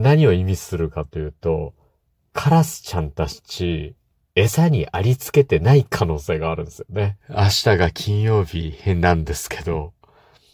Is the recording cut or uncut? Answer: cut